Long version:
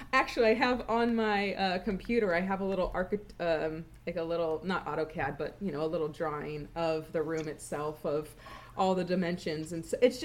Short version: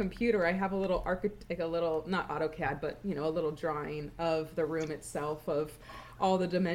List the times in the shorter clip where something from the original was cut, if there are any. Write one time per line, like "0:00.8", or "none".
0:01.5